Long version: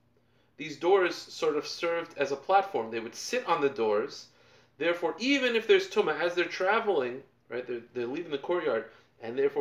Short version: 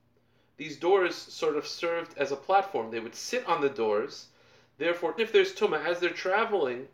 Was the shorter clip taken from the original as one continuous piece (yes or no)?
no